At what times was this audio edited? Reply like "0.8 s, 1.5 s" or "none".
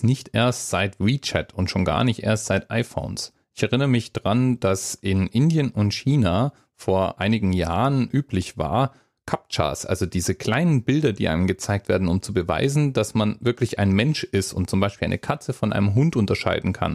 none